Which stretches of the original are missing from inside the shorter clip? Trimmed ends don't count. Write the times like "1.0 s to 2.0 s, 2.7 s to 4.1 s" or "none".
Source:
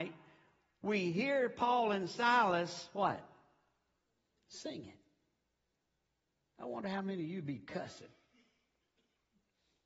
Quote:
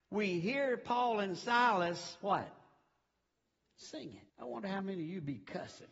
5.0 s to 6.5 s